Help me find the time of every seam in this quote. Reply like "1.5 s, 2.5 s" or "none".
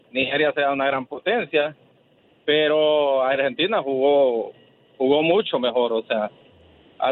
none